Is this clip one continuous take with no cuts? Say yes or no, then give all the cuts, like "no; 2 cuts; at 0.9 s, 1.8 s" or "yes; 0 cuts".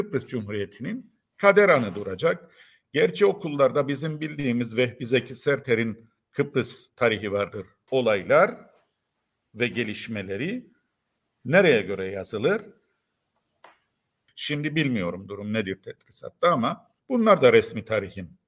no; 3 cuts; at 7.9 s, 14.3 s, 17.0 s